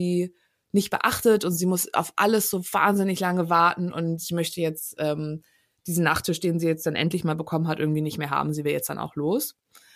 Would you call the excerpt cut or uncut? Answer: uncut